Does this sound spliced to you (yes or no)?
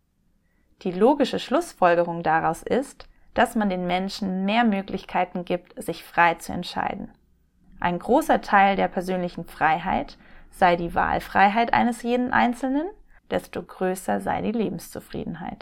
yes